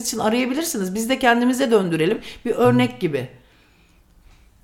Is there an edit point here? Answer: no; 0 cuts

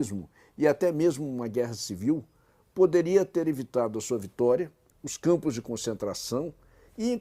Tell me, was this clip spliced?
yes; 1 cut; at 4.9 s

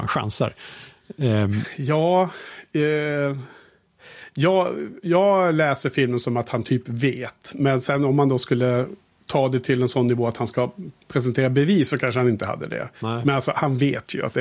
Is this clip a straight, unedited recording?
yes; 0 cuts

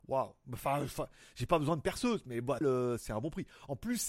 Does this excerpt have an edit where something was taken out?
yes; 1 cut; at 2.6 s

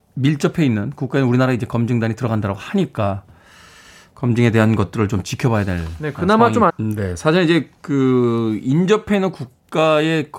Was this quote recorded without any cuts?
no; 1 cut; at 6.7 s

